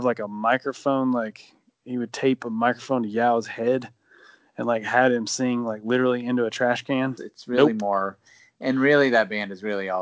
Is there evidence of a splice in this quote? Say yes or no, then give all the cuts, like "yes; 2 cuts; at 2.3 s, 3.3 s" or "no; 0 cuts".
yes; 1 cut; at 7.2 s